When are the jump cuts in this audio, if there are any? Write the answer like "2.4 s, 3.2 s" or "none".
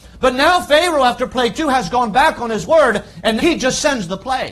3.4 s

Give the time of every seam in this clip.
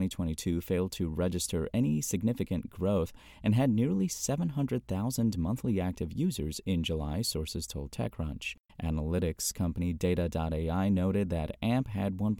8.7 s

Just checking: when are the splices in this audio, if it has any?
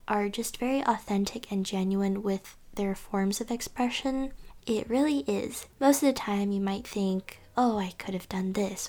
4.6 s, 5.7 s

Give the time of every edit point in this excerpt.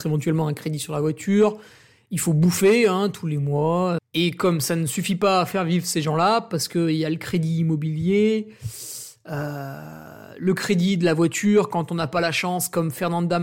4.0 s

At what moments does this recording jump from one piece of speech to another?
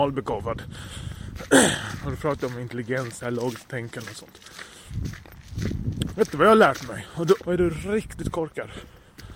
6.1 s, 7.4 s

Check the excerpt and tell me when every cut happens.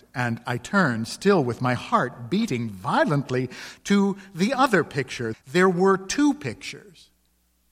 5.3 s

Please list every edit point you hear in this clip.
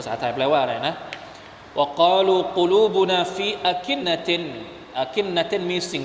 4.0 s

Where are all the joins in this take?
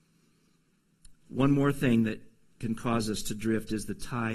none

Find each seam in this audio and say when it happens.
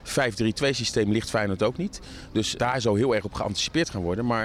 2.6 s

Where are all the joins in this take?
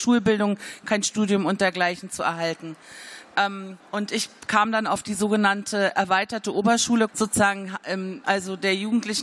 3.8 s, 7.1 s, 8.2 s

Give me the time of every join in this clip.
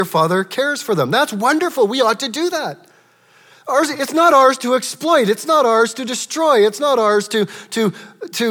none

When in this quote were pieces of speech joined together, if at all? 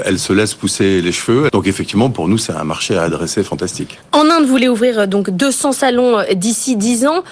1.5 s

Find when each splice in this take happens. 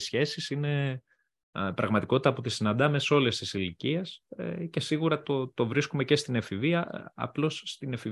none

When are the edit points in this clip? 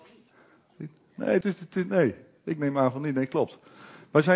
1.4 s

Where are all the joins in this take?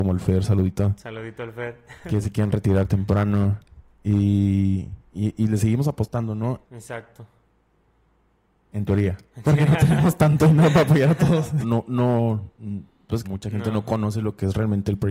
6.6 s, 11.6 s, 13.2 s

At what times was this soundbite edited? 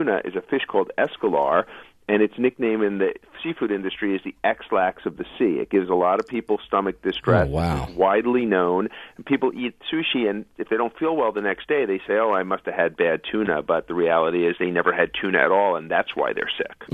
none

